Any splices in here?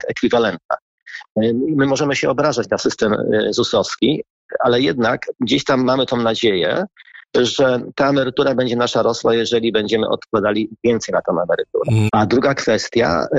yes; 1 cut; at 12.1 s

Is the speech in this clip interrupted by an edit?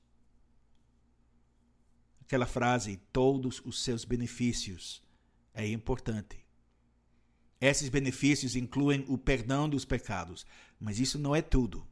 no; 0 cuts

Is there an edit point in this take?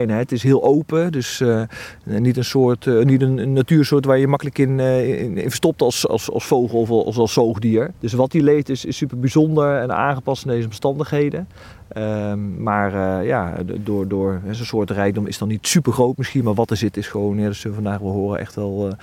yes; 1 cut; at 8.0 s

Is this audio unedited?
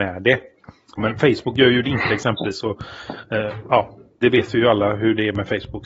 no; 1 cut; at 1.0 s

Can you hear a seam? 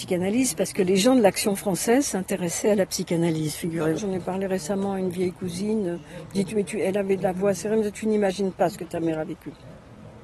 yes; 1 cut; at 4.0 s

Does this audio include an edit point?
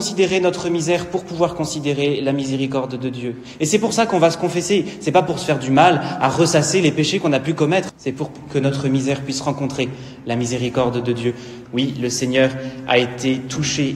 yes; 2 cuts; at 7.9 s, 11.7 s

